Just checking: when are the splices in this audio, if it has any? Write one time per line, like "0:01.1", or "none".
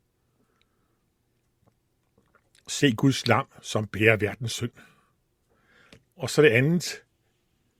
0:06.0